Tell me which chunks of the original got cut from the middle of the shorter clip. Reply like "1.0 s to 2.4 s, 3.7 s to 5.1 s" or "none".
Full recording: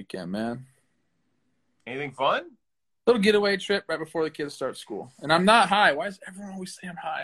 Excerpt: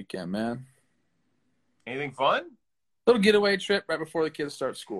none